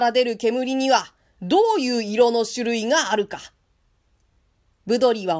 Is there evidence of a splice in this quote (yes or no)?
no